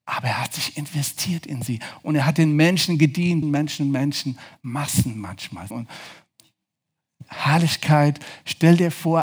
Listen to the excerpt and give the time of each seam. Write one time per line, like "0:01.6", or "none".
0:03.4
0:05.7